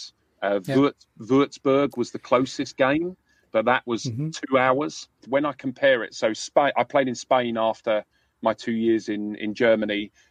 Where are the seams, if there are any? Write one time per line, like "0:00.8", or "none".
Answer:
0:05.2